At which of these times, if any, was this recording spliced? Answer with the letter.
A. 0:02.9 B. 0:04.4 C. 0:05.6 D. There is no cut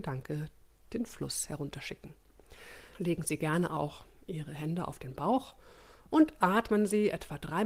A